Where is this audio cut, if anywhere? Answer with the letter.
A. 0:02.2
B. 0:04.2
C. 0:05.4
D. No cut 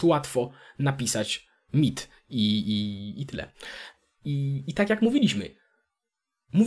B